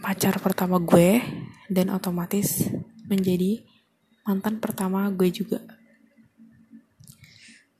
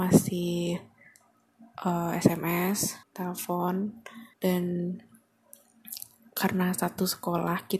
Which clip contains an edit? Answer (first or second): second